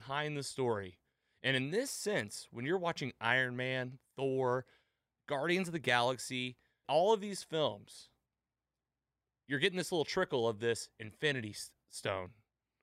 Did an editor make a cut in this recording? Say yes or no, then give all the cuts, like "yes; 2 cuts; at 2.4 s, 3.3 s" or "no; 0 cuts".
yes; 1 cut; at 6.8 s